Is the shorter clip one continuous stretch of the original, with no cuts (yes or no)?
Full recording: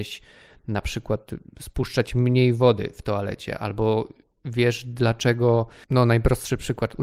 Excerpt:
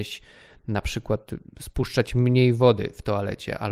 yes